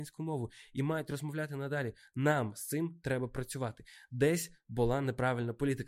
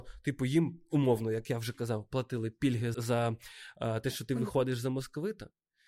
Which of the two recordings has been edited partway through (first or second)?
second